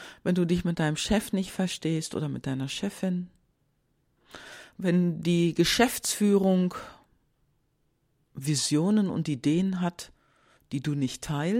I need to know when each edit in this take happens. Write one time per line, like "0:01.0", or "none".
none